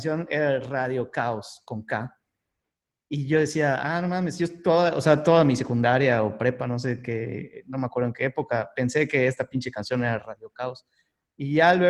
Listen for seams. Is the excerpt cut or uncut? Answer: uncut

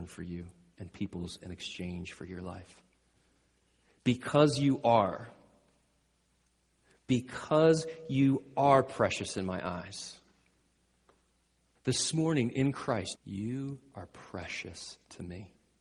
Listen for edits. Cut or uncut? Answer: cut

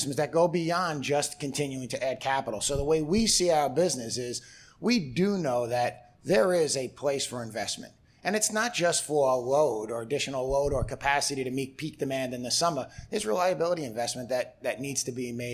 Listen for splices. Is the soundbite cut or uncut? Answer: uncut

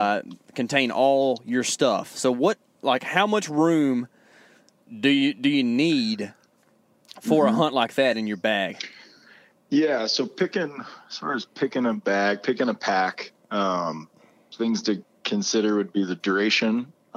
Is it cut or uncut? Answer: uncut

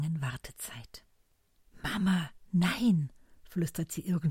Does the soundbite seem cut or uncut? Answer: uncut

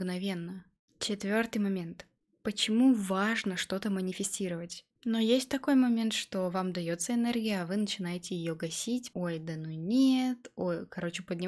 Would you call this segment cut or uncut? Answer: cut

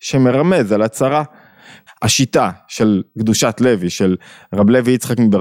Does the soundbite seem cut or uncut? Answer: cut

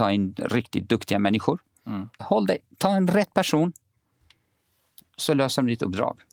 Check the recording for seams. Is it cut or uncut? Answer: cut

